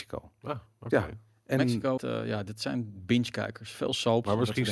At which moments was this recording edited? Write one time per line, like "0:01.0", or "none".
0:02.0